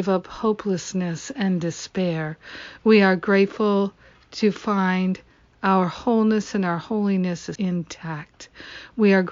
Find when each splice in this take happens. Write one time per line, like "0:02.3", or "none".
0:07.6